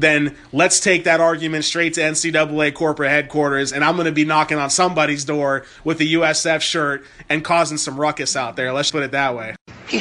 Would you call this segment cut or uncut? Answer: cut